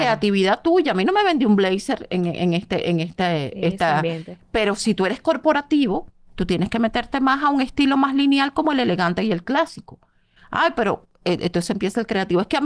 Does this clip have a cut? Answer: no; 0 cuts

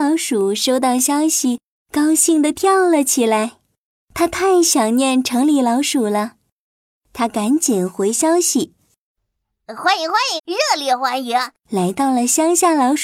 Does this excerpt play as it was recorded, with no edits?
no; 2 cuts; at 10.4 s, 11.6 s

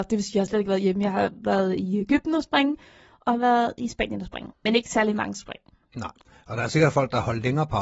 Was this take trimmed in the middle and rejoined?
yes; 1 cut; at 4.5 s

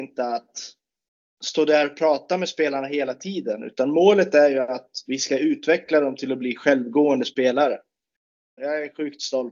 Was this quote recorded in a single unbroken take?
no; 1 cut; at 8.6 s

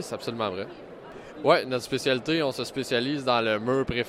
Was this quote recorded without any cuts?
no; 1 cut; at 1.4 s

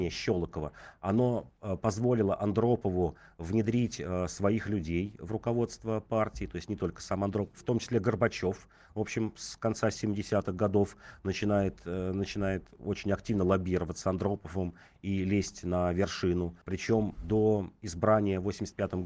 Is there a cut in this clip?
yes; 1 cut; at 16.6 s

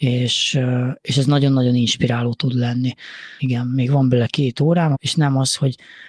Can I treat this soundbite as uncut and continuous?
no; 2 cuts; at 3.4 s, 4.9 s

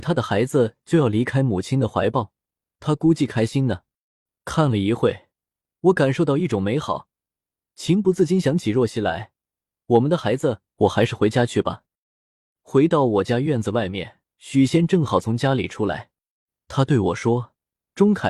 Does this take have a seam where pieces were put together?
yes; 1 cut; at 14.2 s

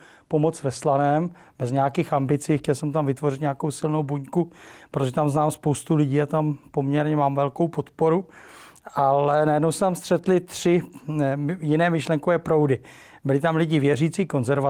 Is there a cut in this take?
no; 0 cuts

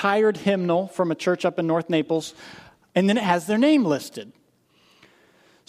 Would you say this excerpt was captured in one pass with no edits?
no; 1 cut; at 2.9 s

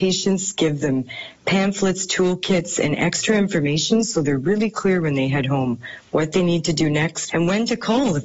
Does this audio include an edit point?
yes; 1 cut; at 7.3 s

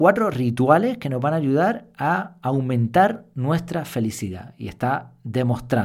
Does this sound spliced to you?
no; 0 cuts

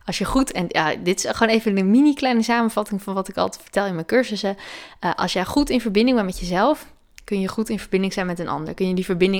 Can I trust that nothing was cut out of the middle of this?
yes; 0 cuts

